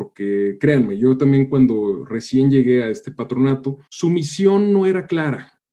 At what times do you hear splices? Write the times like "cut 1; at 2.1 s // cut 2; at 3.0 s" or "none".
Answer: cut 1; at 3.9 s